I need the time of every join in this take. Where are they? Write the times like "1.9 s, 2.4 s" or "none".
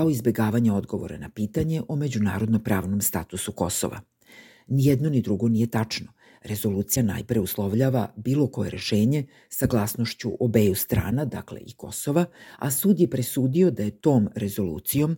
none